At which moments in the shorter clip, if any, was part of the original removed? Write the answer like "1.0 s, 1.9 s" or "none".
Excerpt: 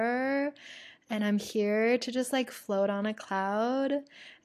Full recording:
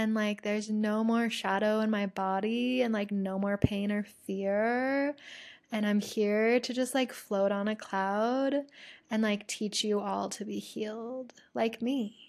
none

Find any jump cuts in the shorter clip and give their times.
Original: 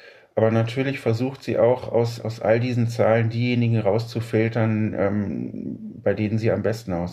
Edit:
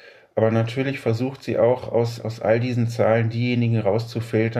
none

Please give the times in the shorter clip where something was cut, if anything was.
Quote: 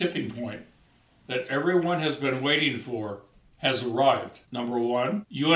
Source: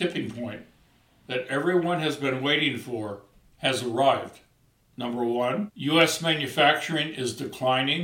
4.4 s

